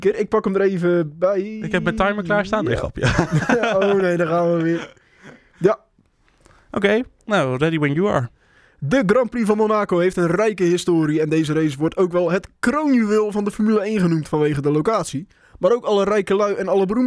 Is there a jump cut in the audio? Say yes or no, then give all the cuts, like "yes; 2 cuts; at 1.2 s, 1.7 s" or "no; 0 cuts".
no; 0 cuts